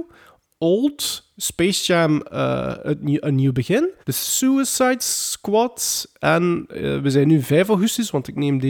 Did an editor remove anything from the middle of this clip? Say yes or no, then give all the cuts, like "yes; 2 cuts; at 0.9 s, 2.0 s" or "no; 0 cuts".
yes; 1 cut; at 4.0 s